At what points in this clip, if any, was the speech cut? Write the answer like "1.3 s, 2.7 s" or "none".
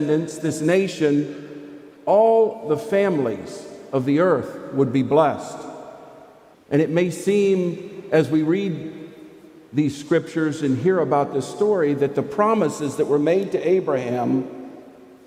6.5 s